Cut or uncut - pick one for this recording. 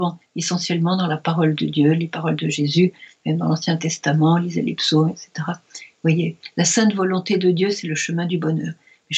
uncut